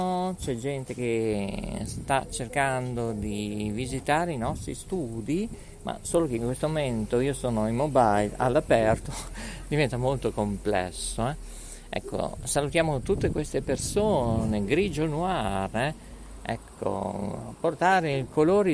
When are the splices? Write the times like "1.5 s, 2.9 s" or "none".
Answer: none